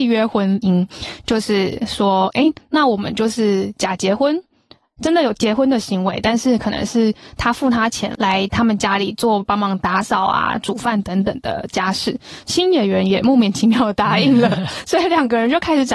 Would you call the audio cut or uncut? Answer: uncut